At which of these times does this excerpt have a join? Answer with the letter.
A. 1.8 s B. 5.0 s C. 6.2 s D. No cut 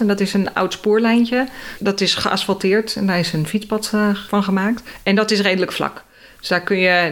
D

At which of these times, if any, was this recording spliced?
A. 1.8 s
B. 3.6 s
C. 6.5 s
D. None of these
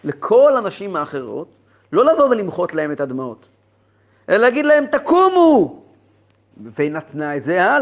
C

